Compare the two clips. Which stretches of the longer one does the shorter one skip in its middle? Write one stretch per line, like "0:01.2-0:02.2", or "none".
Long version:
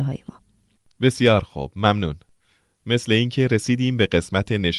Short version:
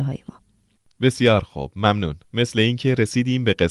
0:02.2-0:02.8